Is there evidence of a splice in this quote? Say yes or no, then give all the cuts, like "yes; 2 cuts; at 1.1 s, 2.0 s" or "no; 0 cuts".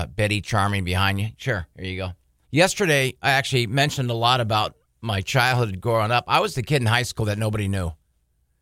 yes; 1 cut; at 2.4 s